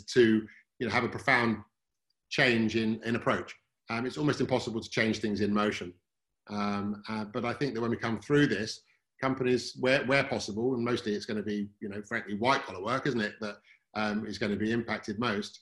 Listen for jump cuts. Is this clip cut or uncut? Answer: uncut